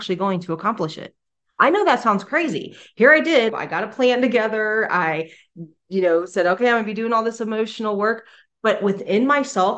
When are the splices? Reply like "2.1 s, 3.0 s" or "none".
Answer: 3.5 s